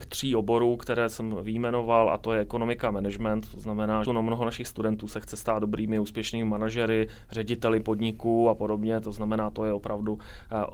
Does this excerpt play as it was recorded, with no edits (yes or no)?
no